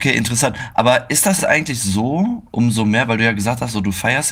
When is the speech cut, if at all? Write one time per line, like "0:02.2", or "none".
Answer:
none